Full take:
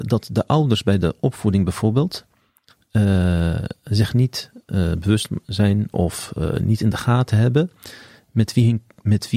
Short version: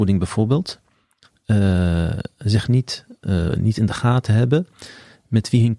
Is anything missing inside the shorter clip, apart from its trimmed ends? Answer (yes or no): yes